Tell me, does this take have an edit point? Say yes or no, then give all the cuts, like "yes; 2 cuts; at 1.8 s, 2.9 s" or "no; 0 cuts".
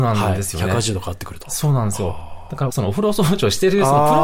yes; 1 cut; at 2.7 s